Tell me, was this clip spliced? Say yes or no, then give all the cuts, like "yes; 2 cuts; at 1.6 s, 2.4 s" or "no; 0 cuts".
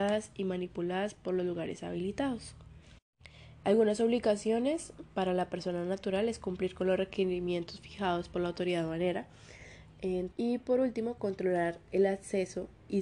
yes; 2 cuts; at 3.6 s, 10.3 s